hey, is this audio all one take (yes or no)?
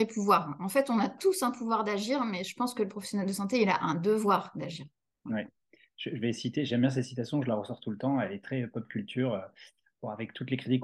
yes